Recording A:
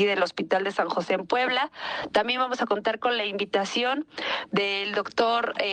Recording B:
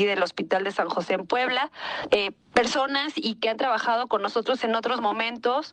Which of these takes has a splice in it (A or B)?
B